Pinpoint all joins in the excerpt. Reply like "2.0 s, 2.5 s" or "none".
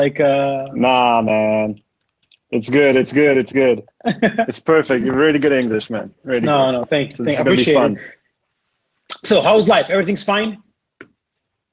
none